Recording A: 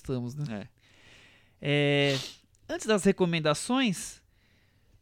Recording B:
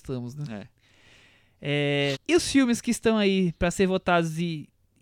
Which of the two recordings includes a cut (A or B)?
B